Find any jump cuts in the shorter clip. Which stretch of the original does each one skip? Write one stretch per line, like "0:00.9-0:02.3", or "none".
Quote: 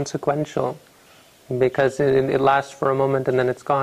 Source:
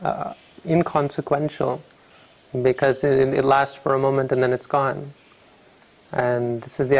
none